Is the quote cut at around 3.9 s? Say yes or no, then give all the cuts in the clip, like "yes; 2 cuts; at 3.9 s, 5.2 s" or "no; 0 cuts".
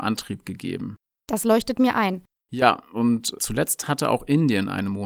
no; 2 cuts; at 1.1 s, 2.4 s